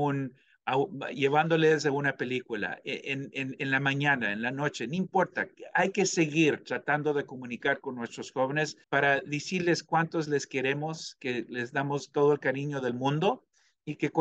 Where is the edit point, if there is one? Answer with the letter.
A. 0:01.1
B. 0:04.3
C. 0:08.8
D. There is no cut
C